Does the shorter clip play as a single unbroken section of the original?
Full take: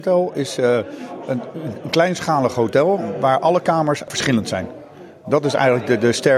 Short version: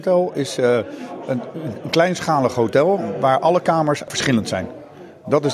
yes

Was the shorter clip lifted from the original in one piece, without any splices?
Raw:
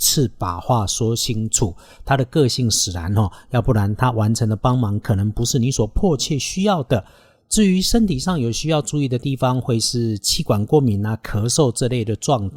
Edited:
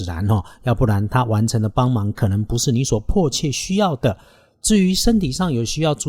yes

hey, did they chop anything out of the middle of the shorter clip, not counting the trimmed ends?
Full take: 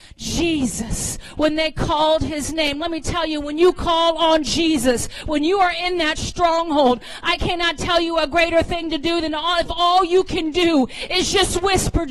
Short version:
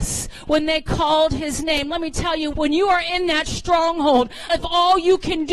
yes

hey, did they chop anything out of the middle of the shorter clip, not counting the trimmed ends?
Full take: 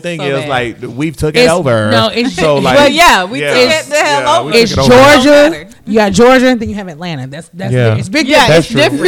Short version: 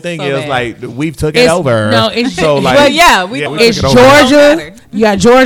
yes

